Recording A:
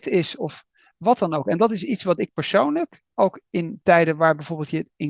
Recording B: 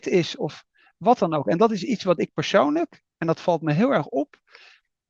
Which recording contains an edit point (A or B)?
A